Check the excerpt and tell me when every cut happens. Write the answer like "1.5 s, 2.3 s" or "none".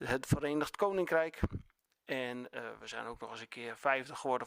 none